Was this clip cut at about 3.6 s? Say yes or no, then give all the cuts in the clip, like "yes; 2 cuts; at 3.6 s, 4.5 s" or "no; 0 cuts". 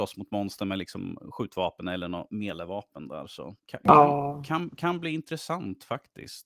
yes; 1 cut; at 3.6 s